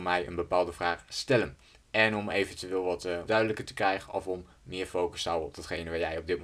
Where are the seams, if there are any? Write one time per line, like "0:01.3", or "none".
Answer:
0:01.7
0:03.3